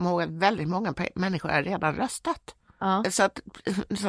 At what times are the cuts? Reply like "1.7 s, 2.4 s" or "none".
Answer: 3.0 s